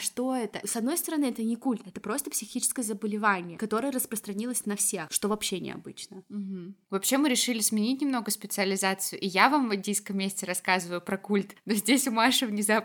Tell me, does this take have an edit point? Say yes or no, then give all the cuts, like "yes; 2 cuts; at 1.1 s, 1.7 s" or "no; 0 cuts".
yes; 1 cut; at 6.8 s